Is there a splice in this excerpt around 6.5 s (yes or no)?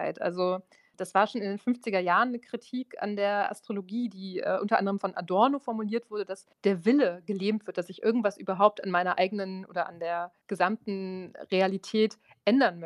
yes